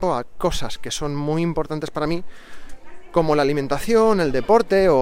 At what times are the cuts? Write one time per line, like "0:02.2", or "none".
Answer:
none